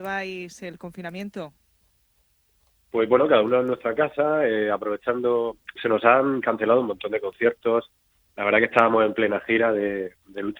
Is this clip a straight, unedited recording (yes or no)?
no